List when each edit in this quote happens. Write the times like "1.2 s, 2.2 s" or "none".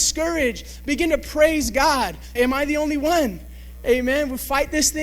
2.4 s